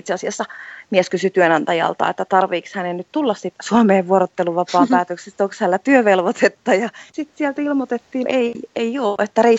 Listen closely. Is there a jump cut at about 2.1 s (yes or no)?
no